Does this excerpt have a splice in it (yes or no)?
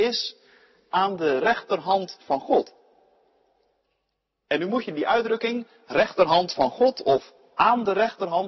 no